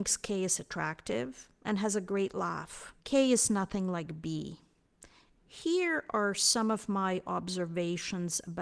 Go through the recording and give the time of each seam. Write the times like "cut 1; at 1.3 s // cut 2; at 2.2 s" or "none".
cut 1; at 3.0 s // cut 2; at 5.3 s